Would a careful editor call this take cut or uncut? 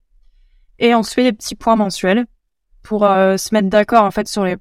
uncut